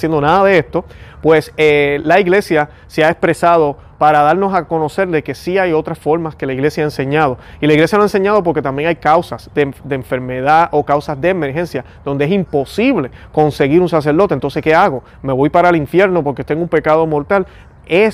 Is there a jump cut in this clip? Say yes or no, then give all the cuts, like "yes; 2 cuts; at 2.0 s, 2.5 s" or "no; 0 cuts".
no; 0 cuts